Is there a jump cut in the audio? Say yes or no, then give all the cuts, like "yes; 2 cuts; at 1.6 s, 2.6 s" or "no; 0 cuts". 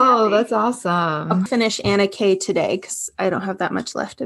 yes; 1 cut; at 1.5 s